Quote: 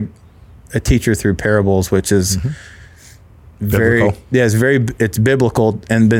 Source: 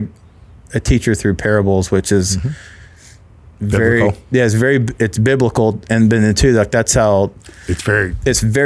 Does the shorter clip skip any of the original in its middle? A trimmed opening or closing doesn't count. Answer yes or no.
no